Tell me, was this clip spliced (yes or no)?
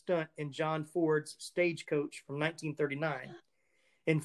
no